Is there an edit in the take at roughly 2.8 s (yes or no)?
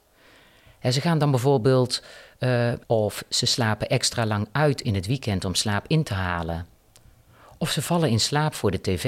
yes